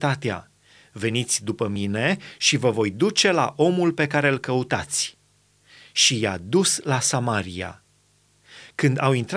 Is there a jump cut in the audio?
no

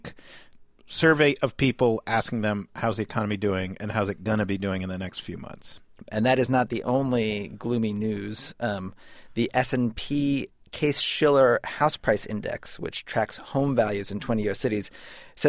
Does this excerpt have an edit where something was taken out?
no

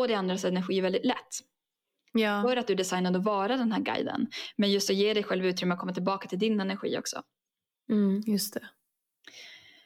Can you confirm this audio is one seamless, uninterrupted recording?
yes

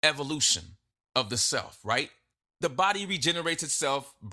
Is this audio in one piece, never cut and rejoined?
yes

